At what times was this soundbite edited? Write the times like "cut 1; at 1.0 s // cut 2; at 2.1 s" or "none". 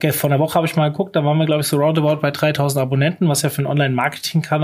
none